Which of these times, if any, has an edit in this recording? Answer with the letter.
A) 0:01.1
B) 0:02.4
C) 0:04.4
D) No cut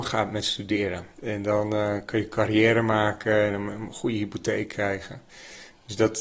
A